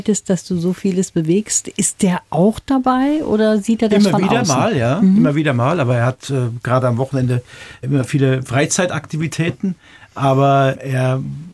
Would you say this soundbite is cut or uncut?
uncut